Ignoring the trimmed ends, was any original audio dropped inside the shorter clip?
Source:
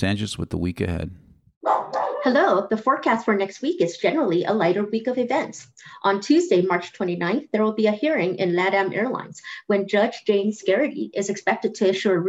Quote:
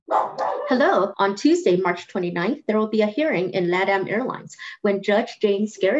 yes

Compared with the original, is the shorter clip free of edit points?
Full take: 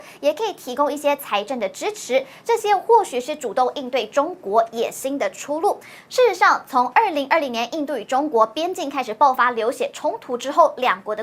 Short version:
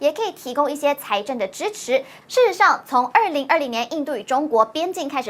no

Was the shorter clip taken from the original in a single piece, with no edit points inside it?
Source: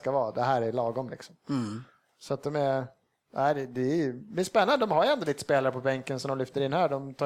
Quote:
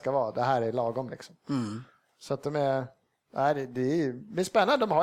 yes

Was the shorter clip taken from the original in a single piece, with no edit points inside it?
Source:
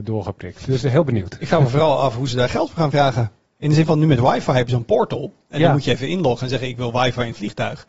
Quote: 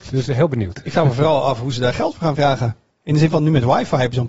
yes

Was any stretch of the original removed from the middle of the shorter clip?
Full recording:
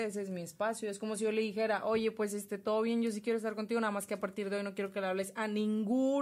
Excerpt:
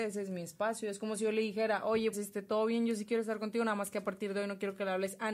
yes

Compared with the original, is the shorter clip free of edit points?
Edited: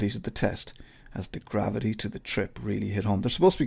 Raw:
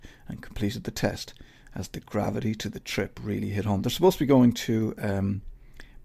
yes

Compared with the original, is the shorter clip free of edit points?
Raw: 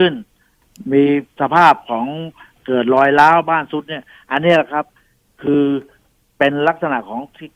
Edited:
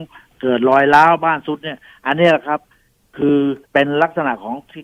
no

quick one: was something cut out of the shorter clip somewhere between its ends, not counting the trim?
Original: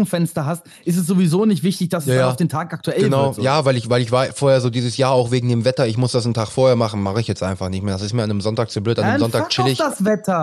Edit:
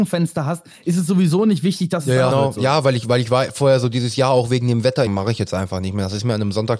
yes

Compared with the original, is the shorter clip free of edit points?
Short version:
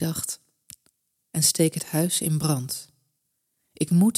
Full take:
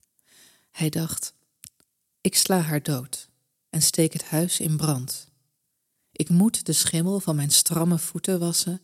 no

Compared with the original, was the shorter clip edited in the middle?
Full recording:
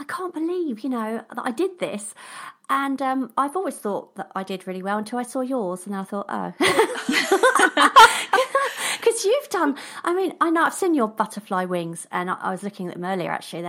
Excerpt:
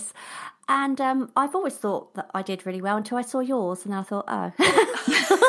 no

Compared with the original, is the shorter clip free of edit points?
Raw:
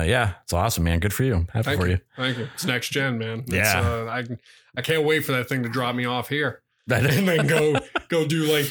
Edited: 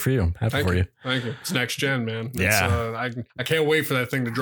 no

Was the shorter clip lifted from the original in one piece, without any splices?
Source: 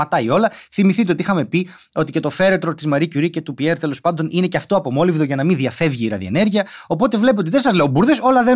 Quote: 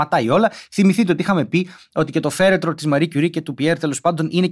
yes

